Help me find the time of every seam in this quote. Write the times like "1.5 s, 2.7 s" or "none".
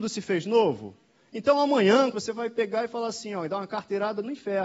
2.1 s